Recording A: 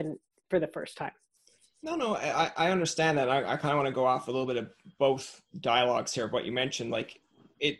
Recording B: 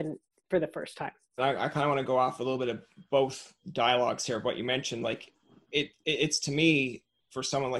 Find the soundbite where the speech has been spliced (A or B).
B